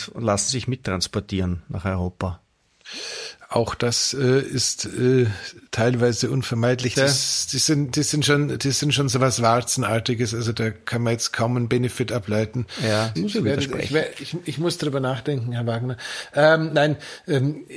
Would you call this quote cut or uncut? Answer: cut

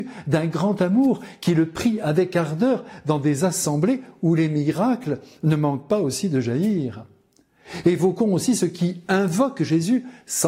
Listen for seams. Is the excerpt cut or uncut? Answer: uncut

